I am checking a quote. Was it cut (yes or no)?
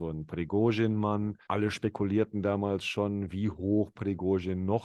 yes